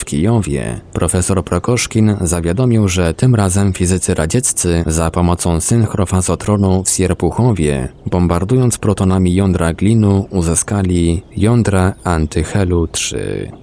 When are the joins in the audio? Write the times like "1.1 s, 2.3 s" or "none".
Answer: none